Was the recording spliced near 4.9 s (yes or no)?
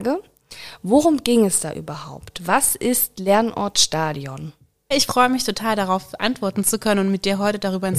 yes